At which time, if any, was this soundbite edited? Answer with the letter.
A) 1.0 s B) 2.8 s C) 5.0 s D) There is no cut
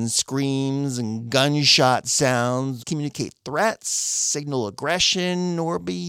B